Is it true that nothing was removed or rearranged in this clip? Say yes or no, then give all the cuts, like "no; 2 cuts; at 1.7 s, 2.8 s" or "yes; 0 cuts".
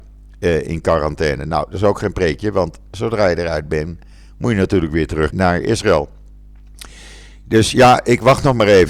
no; 1 cut; at 5.3 s